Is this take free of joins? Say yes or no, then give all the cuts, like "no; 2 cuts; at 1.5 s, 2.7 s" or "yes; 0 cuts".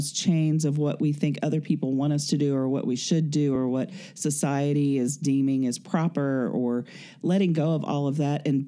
yes; 0 cuts